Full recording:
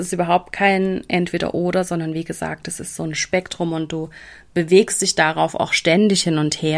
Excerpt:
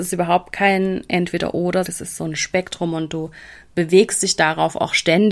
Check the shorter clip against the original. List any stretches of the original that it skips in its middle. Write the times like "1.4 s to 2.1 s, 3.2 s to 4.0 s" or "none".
1.8 s to 2.6 s